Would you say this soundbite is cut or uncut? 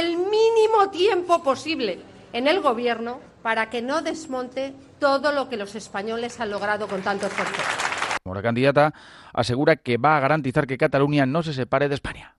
cut